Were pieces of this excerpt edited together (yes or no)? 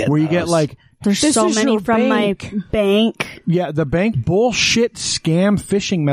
yes